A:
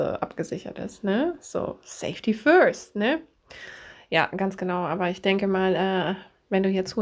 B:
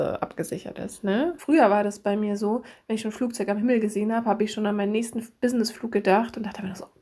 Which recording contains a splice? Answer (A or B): B